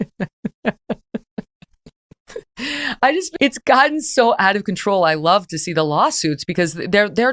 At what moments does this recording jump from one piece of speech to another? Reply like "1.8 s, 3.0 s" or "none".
3.4 s